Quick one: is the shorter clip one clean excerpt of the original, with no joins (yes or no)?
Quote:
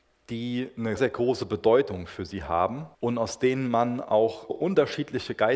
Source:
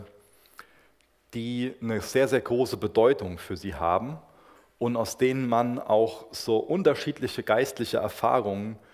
no